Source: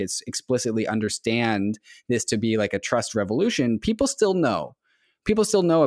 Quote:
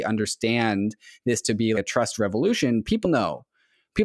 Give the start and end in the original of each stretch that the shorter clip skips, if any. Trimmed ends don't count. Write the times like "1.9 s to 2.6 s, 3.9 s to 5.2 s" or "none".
2.6 s to 2.7 s, 4.0 s to 4.3 s